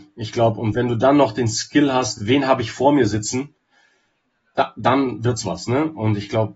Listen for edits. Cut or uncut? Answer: uncut